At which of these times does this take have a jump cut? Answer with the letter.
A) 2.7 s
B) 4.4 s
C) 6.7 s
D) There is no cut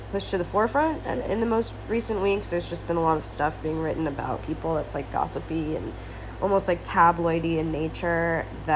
B